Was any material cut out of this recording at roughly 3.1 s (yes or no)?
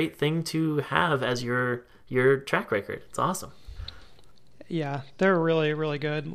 no